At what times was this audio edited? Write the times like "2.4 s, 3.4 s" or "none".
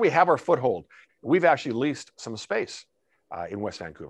1.1 s

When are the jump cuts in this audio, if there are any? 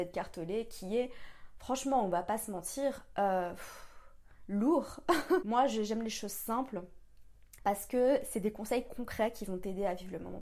5.4 s, 7.6 s

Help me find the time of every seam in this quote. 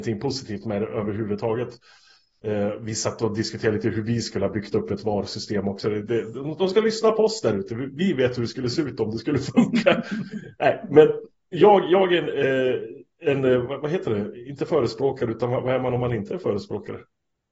none

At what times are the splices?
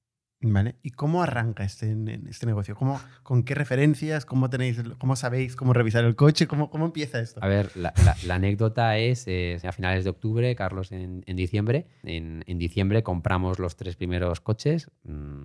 9.6 s, 12.0 s

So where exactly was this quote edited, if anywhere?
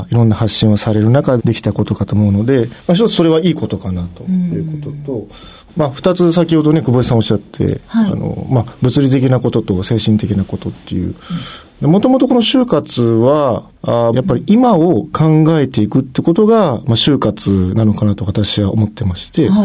1.4 s, 14.1 s

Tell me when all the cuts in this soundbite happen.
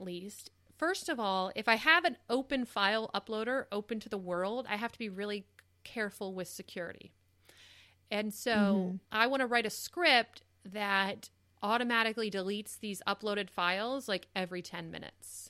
9.0 s

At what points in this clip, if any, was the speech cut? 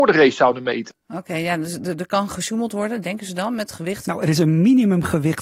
1.0 s, 4.0 s

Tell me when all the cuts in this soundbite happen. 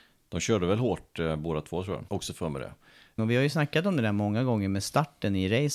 2.1 s, 3.2 s

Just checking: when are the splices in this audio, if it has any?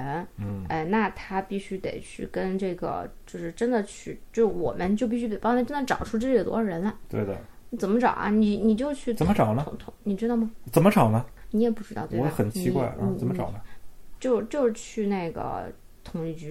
12.5 s

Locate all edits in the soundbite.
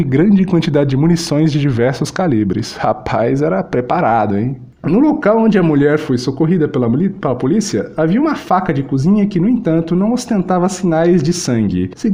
none

